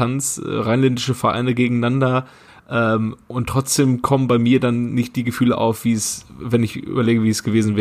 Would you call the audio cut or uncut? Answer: uncut